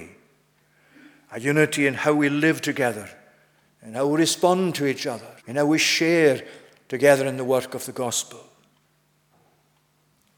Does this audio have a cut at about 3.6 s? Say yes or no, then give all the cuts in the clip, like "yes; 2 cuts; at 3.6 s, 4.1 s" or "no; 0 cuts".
yes; 2 cuts; at 3.6 s, 5.4 s